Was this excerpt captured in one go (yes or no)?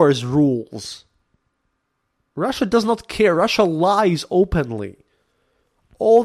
yes